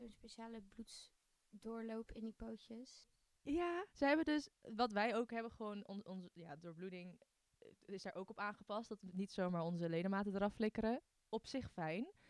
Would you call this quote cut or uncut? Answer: cut